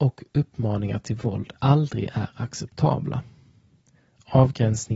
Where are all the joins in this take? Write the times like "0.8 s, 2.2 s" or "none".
none